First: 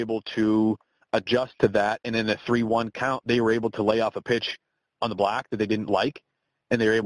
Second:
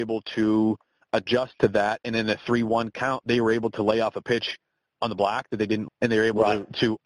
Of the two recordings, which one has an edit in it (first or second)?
second